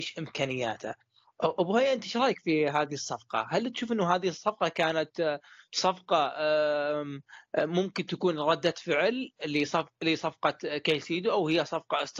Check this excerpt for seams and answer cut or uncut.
uncut